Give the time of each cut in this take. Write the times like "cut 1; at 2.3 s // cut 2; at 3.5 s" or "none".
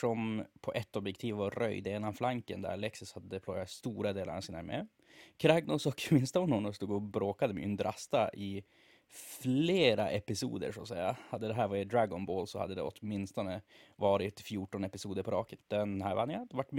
cut 1; at 15.6 s